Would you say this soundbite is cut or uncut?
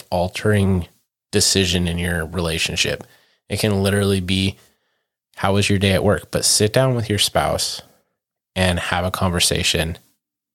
uncut